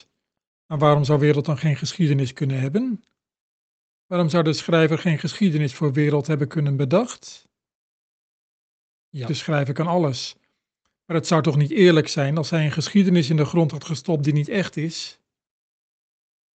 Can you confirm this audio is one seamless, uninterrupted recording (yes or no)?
no